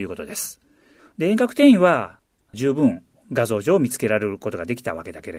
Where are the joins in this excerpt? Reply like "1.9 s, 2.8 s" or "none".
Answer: 1.0 s

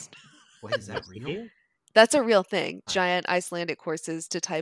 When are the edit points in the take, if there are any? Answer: 2.9 s

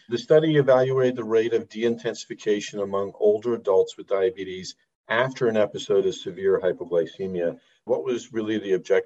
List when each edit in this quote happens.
7.9 s

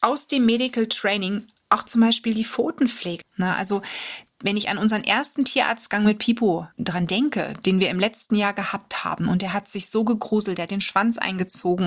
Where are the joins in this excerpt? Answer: 3.2 s, 6.7 s

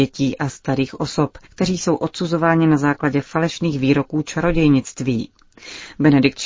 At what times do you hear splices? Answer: 1.4 s

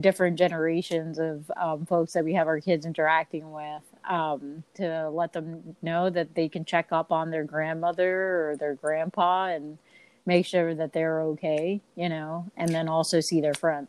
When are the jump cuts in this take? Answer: 4.7 s

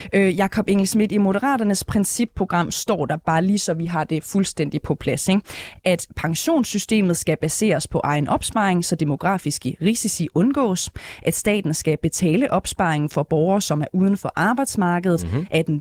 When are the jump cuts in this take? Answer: none

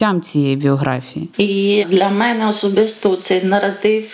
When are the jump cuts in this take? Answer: 1.3 s

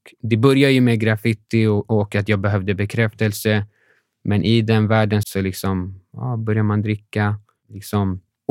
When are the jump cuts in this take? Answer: 5.2 s

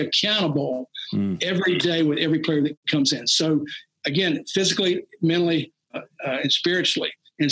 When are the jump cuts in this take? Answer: 5.9 s

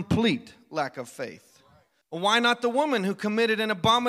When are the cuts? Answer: 2.0 s

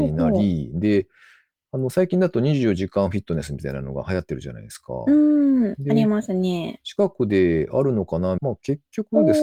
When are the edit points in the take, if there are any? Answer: 8.4 s

